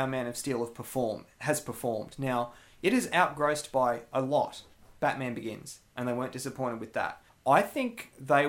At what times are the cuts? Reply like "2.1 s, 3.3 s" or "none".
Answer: 7.3 s